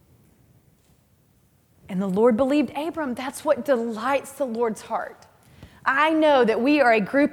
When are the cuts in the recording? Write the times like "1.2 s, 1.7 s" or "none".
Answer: none